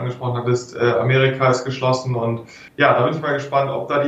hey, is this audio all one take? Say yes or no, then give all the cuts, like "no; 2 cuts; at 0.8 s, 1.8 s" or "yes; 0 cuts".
no; 1 cut; at 2.7 s